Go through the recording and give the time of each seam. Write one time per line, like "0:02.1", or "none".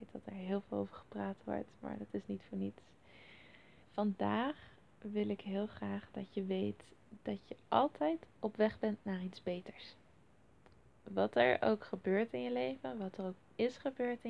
0:03.8